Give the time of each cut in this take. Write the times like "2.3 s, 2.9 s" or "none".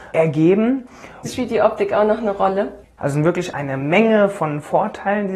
1.2 s, 3.0 s